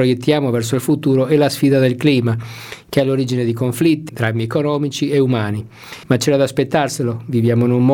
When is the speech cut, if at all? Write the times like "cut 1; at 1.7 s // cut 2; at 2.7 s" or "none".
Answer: cut 1; at 4.1 s // cut 2; at 6.0 s